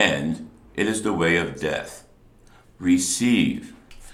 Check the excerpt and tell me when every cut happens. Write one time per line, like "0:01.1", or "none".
0:02.6